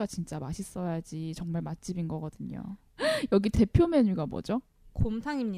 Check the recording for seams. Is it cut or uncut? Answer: cut